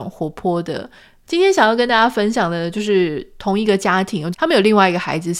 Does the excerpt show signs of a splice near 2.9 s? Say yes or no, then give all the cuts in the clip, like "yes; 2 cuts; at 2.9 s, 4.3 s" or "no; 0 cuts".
no; 2 cuts; at 1.2 s, 4.3 s